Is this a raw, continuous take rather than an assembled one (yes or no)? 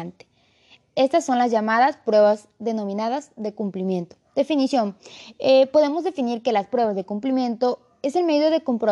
yes